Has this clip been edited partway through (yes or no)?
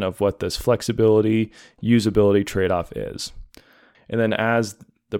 yes